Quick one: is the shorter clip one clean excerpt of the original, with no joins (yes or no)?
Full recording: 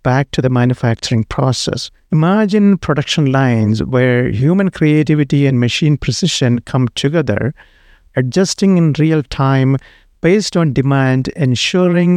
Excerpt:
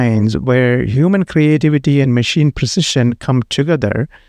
yes